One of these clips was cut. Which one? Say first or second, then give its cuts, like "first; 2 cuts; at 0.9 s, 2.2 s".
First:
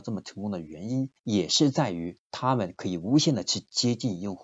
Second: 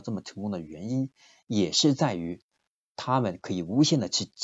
first; 2 cuts; at 1.2 s, 2.3 s